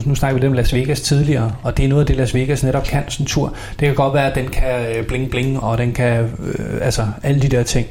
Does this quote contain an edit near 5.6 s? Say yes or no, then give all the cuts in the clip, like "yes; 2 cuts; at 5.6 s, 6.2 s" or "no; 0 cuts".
yes; 1 cut; at 5.6 s